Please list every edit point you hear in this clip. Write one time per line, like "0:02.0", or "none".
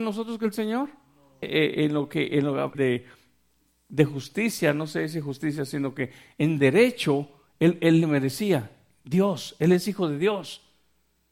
0:01.4
0:02.7

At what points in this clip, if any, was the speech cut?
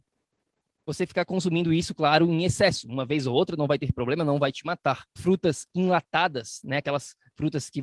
0:05.2

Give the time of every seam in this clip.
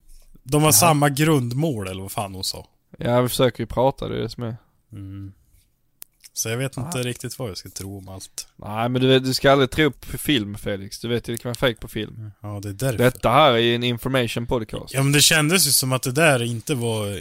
0:09.9

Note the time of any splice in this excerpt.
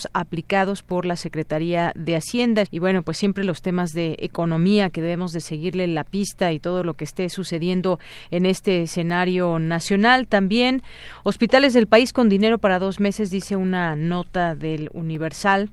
0:02.6

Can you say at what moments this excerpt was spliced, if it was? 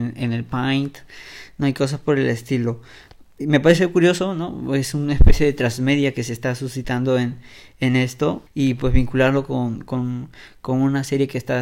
0:08.5

